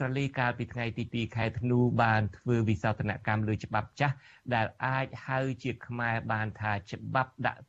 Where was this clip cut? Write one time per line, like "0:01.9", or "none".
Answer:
none